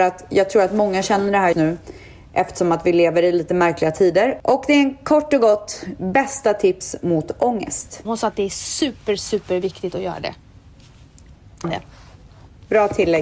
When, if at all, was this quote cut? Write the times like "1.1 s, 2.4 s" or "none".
1.5 s, 8.1 s, 11.6 s